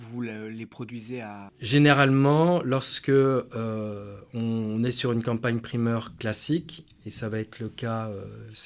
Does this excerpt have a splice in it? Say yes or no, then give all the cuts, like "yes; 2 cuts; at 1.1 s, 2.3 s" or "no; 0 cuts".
yes; 1 cut; at 1.5 s